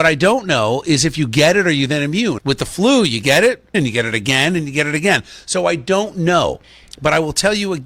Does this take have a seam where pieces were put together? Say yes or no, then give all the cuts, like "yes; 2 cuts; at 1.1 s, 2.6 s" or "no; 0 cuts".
yes; 2 cuts; at 2.4 s, 3.7 s